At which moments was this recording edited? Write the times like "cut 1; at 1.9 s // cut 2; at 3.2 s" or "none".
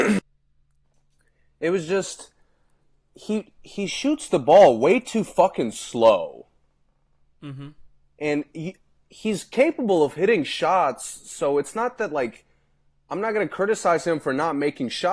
none